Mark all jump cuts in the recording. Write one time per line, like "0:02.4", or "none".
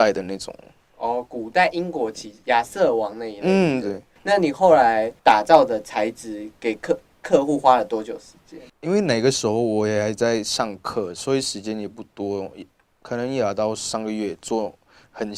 0:03.8